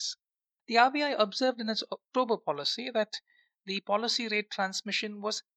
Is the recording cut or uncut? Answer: uncut